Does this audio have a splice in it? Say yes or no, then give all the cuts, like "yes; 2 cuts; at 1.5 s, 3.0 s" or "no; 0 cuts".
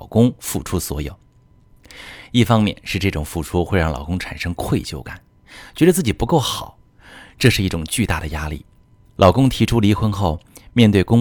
yes; 1 cut; at 9.2 s